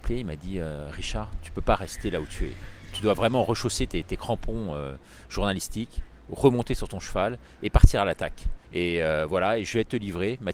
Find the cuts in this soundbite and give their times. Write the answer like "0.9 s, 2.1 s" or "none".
8.6 s